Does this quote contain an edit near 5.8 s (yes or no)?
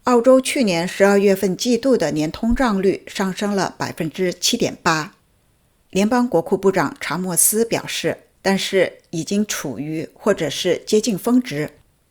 yes